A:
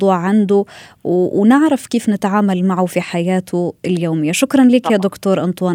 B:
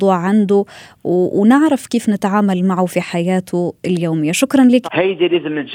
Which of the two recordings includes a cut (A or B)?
B